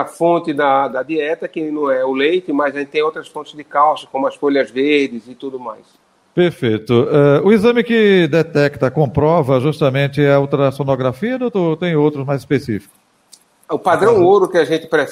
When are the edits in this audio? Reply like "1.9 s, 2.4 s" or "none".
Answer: none